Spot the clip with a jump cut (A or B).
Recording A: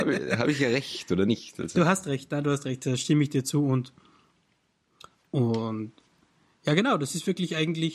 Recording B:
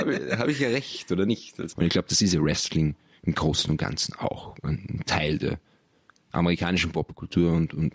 B